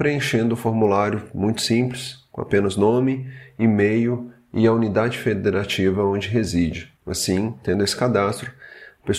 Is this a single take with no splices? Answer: no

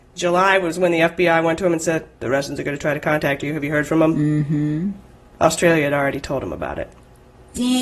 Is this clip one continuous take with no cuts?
yes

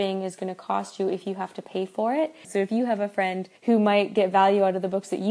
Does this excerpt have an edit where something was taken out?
yes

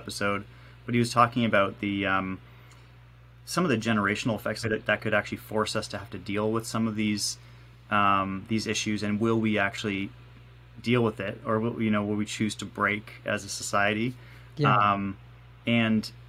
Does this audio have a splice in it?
yes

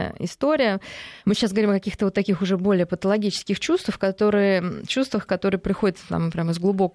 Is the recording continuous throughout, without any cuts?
no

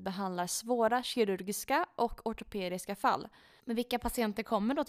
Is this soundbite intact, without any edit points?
no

